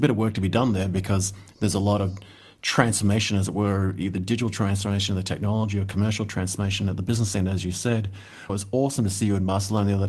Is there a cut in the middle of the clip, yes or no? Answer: yes